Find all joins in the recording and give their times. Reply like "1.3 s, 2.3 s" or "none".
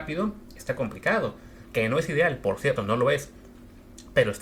1.6 s, 2.8 s